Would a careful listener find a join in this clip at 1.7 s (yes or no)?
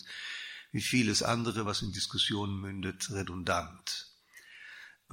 no